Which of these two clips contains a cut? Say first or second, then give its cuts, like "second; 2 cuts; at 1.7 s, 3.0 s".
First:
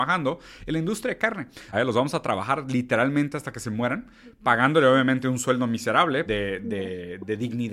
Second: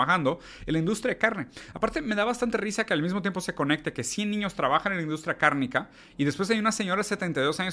first; 2 cuts; at 1.7 s, 6.3 s